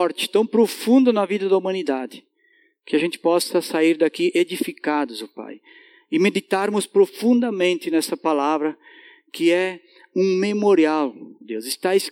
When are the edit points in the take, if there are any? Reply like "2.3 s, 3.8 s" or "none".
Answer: none